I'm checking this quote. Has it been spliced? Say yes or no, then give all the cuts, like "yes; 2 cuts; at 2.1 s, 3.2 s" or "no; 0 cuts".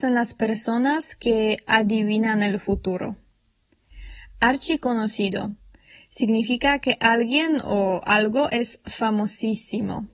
no; 0 cuts